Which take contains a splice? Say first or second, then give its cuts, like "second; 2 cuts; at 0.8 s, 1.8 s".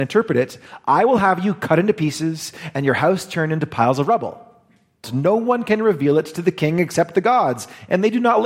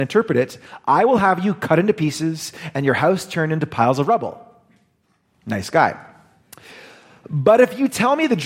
first; 1 cut; at 5.0 s